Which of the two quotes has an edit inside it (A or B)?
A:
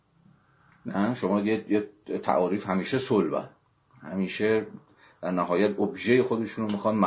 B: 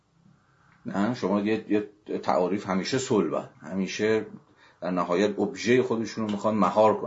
B